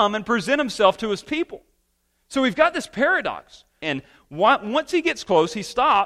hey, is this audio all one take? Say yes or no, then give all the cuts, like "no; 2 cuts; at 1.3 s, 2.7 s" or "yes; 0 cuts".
no; 1 cut; at 3.8 s